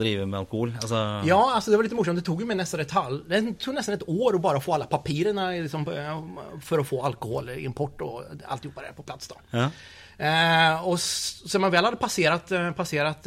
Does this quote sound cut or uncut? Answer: uncut